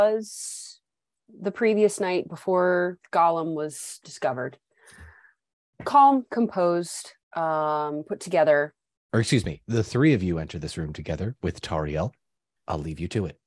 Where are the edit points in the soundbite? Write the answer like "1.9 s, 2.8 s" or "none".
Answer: 7.2 s, 9.0 s